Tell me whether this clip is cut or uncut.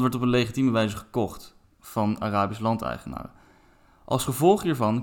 uncut